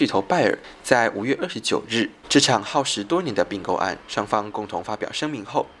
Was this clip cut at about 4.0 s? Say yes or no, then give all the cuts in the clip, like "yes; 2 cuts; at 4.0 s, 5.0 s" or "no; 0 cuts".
yes; 2 cuts; at 2.2 s, 4.0 s